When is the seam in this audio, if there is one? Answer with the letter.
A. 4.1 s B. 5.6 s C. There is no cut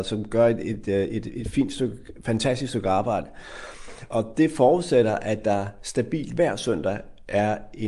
A